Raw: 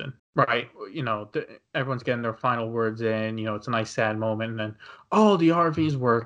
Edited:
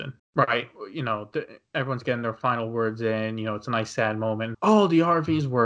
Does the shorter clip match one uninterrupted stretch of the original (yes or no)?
no